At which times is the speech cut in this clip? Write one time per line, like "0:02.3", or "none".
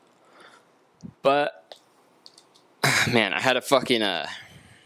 0:01.1

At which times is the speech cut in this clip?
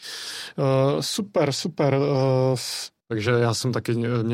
0:03.0

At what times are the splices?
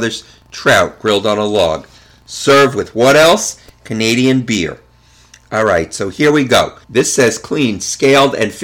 0:06.8

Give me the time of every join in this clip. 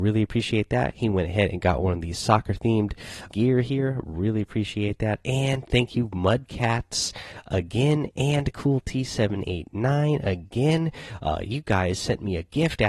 0:03.3

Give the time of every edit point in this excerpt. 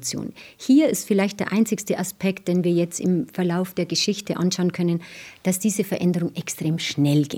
none

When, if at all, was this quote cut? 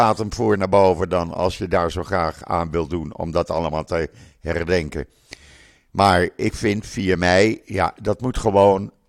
none

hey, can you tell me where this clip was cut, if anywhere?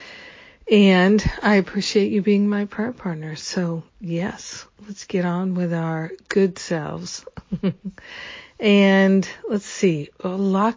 none

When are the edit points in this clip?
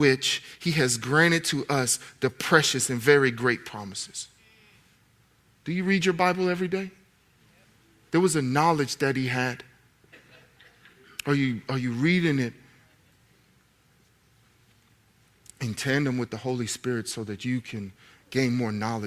0:08.1
0:10.1

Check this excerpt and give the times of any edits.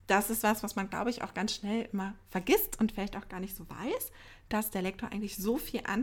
none

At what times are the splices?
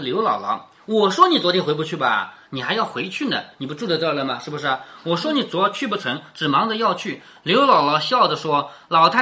none

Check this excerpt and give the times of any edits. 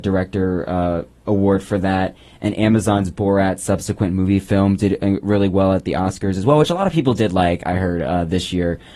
none

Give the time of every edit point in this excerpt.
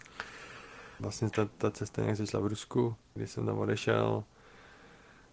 0:01.0
0:03.2

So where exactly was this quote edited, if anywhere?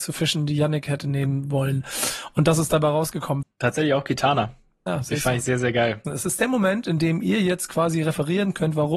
0:03.4
0:06.0

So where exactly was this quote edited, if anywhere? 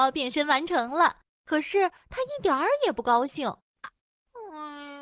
0:03.8

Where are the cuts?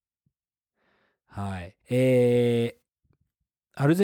0:01.8

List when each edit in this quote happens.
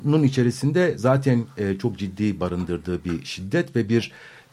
none

